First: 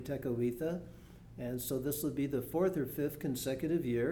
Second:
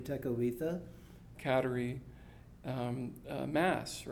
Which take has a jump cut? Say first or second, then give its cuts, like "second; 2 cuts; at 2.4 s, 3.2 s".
second; 1 cut; at 1.3 s